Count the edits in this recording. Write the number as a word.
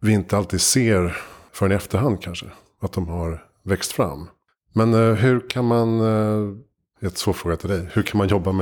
zero